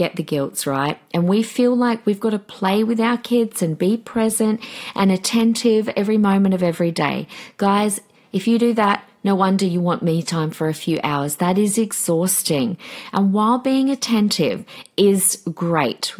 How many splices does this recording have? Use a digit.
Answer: 0